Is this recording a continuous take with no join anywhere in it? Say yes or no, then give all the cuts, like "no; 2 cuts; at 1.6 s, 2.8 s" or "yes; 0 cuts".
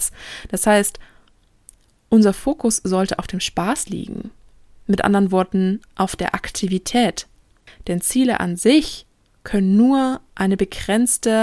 no; 1 cut; at 5.9 s